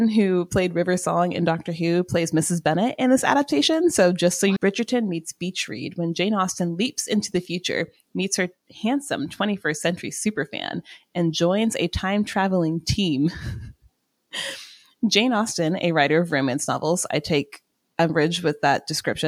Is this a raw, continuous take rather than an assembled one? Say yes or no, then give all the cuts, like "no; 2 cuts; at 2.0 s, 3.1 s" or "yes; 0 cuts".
no; 1 cut; at 4.6 s